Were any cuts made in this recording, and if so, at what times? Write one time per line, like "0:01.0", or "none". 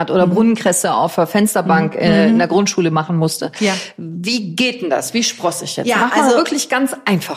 none